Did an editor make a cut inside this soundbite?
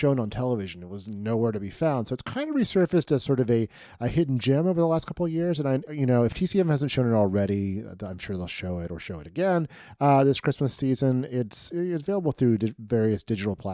no; 0 cuts

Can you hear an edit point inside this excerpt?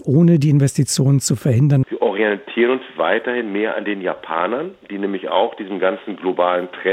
yes; 1 cut; at 1.8 s

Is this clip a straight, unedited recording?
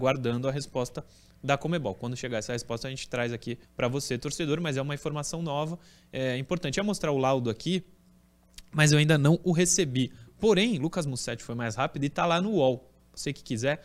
no; 1 cut; at 3.6 s

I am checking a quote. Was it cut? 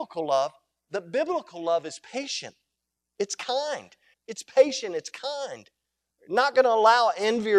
yes; 1 cut; at 4.1 s

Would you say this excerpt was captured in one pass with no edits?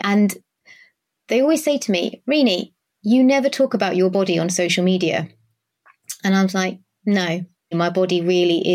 no; 1 cut; at 7.7 s

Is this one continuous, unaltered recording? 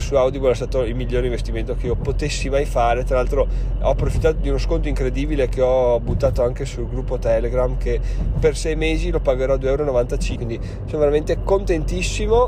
no; 1 cut; at 10.3 s

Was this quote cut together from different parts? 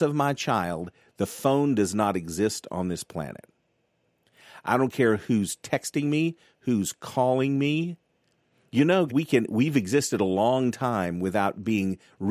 yes; 1 cut; at 9.1 s

